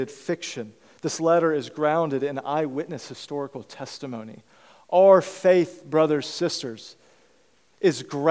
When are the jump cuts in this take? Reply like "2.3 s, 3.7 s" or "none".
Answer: none